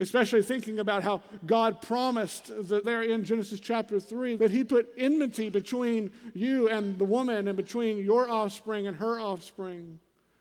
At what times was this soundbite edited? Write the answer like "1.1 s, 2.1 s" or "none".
2.8 s, 4.4 s